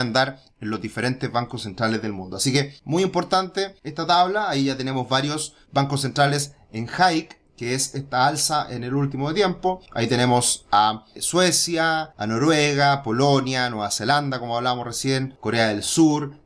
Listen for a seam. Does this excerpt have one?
no; 0 cuts

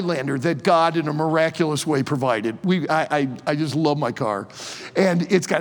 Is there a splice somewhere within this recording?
no; 0 cuts

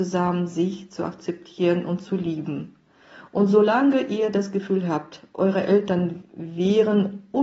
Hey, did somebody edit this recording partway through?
no; 0 cuts

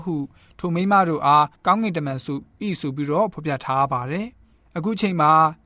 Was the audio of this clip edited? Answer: no; 0 cuts

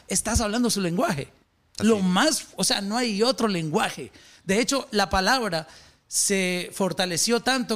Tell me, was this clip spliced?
yes; 1 cut; at 1.8 s

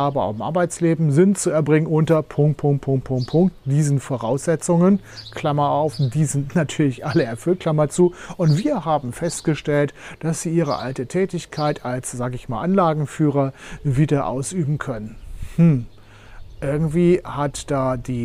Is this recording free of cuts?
yes; 0 cuts

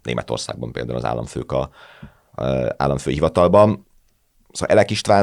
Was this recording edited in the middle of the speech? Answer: no; 0 cuts

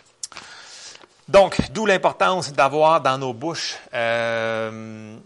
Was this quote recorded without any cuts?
yes; 0 cuts

